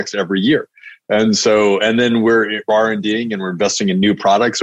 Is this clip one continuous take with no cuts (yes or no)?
yes